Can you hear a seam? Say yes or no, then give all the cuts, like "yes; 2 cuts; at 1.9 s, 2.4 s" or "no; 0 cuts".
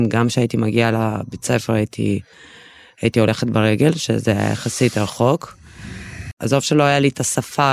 yes; 1 cut; at 6.3 s